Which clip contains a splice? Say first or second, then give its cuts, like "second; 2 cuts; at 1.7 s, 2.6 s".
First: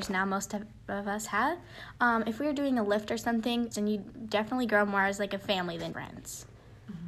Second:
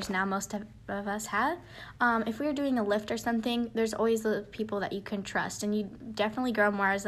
first; 2 cuts; at 3.7 s, 5.9 s